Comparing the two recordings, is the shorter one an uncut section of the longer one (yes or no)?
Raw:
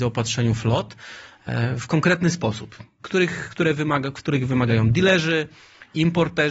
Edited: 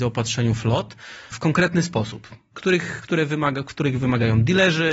no